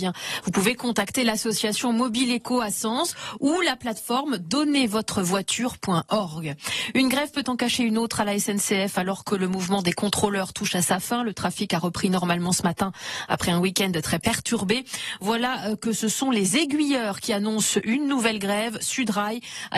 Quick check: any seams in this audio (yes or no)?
no